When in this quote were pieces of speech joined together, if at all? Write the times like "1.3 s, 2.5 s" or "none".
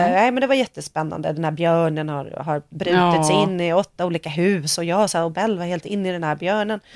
none